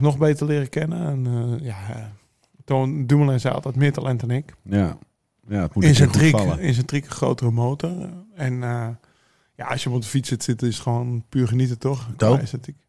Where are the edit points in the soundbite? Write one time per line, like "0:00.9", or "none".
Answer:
none